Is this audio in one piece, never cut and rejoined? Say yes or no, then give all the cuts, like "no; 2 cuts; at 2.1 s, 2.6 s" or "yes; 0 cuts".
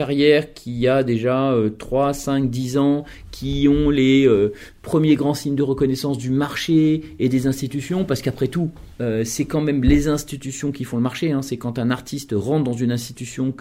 yes; 0 cuts